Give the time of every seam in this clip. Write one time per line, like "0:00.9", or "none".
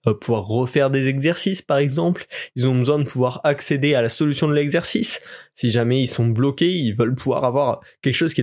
none